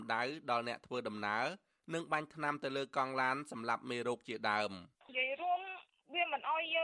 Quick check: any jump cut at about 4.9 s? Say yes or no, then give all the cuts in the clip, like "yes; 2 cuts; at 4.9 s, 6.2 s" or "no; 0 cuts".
yes; 1 cut; at 4.9 s